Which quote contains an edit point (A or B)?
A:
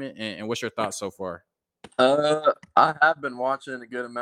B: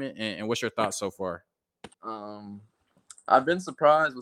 B